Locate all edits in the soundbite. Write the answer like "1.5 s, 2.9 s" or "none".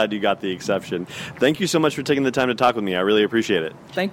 none